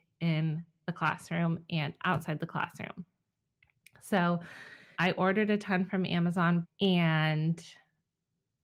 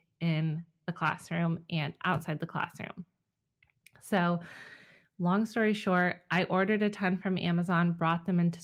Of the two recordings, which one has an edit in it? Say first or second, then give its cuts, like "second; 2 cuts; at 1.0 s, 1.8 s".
first; 2 cuts; at 4.9 s, 6.6 s